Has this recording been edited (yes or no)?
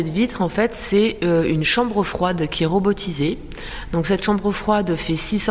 no